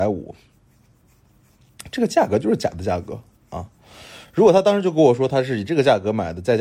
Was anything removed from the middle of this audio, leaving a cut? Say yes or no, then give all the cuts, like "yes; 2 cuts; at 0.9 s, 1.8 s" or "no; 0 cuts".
no; 0 cuts